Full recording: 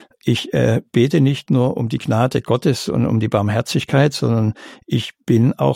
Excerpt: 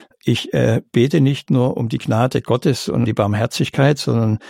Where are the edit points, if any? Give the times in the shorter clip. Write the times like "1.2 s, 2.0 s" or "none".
3.1 s